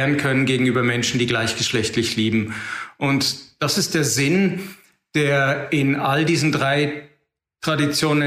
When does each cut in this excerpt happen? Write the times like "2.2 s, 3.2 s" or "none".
none